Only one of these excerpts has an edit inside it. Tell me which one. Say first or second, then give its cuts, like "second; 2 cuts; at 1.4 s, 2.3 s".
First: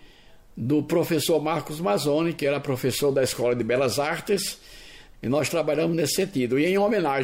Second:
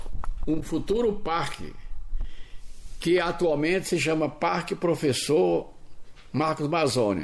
first; 1 cut; at 5.1 s